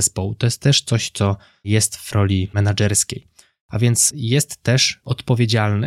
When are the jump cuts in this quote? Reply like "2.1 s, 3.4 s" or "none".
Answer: none